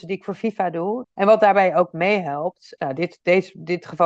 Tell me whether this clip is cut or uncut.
cut